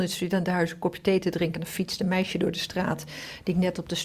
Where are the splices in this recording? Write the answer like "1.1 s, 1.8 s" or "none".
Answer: none